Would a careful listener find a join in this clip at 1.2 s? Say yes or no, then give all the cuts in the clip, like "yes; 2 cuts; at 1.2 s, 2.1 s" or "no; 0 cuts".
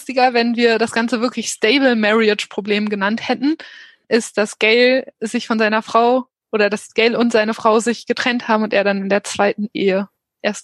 no; 0 cuts